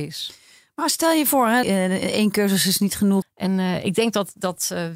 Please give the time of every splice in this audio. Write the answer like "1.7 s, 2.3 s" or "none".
1.6 s, 3.2 s